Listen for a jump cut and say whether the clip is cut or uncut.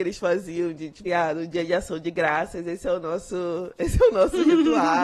cut